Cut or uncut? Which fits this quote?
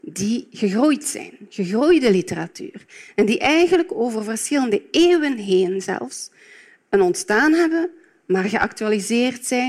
uncut